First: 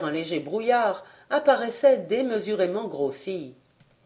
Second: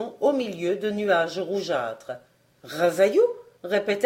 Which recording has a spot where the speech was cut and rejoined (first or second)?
second